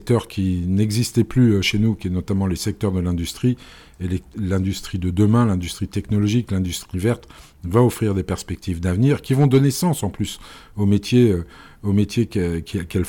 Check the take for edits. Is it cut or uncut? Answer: uncut